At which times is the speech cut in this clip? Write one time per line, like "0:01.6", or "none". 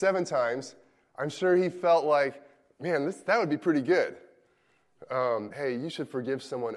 0:05.5